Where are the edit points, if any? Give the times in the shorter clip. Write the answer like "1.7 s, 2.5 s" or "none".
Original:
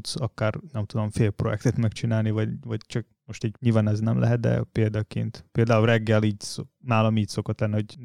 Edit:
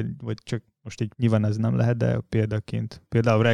none